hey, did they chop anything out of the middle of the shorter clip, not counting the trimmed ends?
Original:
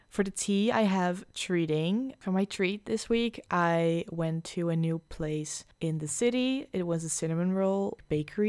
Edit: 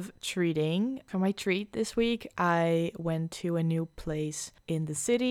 no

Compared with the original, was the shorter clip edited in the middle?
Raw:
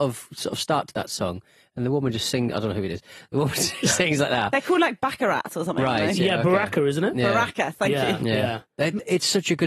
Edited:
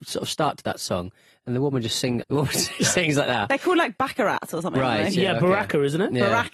yes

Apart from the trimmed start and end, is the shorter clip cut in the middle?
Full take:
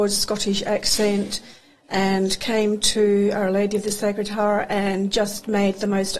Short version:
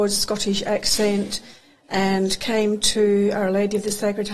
no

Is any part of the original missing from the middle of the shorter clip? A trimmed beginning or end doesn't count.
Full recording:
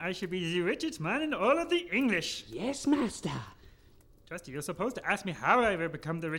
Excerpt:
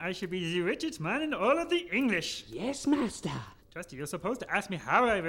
yes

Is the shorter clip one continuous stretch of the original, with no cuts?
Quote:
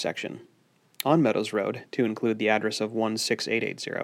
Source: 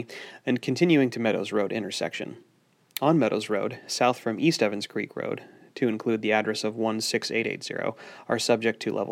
no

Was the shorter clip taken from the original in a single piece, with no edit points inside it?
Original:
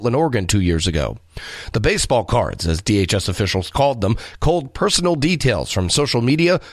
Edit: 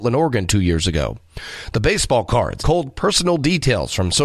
no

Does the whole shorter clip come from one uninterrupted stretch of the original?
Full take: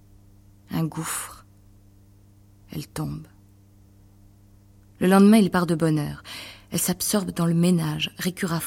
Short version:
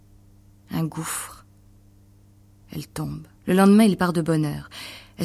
no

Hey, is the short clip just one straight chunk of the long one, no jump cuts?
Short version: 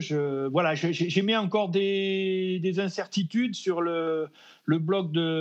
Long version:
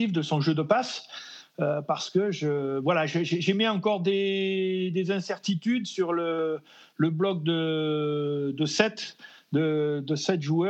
yes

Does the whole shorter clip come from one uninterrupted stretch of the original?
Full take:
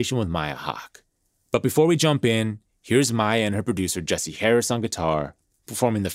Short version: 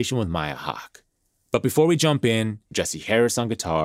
no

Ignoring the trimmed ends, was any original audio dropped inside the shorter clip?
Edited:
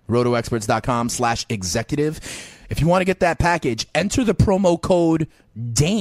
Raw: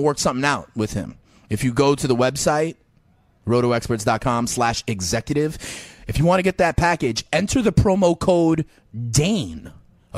no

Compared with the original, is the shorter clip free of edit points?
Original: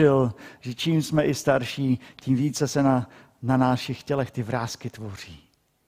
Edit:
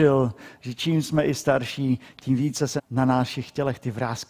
no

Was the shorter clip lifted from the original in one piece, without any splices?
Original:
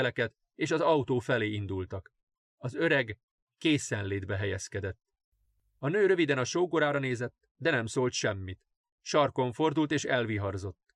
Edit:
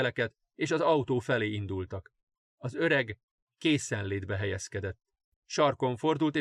no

